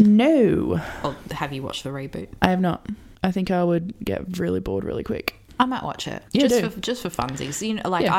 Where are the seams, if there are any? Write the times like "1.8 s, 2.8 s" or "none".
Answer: 6.3 s